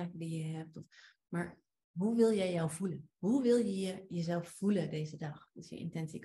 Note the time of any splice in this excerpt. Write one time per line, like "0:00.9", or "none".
none